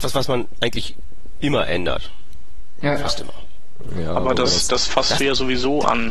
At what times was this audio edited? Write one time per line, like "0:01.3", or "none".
none